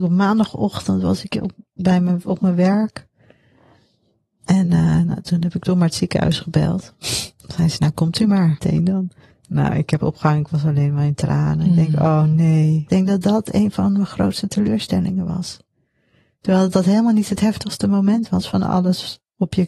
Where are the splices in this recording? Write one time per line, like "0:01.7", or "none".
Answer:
none